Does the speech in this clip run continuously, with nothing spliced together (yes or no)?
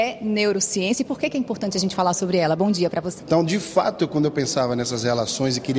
no